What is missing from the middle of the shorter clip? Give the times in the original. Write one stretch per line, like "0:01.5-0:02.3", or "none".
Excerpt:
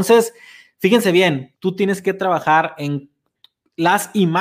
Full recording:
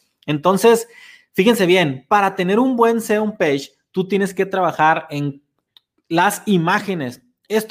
0:02.1-0:03.8